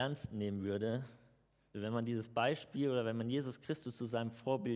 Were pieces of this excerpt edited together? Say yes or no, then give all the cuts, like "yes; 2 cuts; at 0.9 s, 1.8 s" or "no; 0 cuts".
yes; 1 cut; at 1.7 s